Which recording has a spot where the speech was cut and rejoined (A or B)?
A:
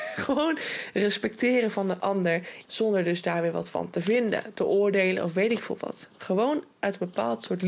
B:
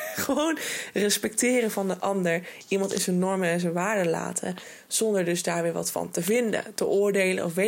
A